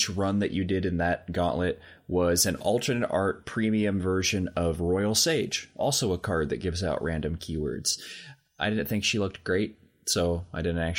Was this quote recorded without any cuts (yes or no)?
yes